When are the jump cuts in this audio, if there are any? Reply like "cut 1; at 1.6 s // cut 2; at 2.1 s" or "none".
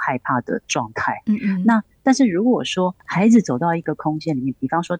none

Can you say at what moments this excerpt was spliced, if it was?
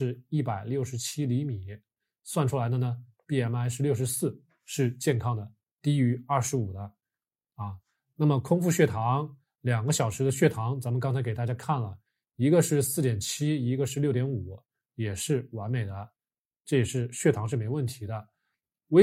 none

